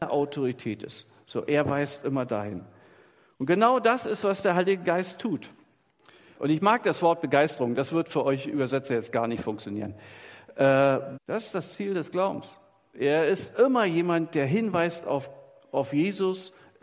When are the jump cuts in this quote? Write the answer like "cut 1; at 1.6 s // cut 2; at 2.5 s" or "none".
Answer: cut 1; at 6.3 s // cut 2; at 11.1 s // cut 3; at 12.9 s